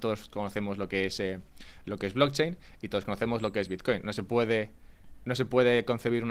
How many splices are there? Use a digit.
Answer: 0